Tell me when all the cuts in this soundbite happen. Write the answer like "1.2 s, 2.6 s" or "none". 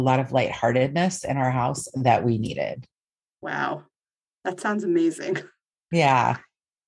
none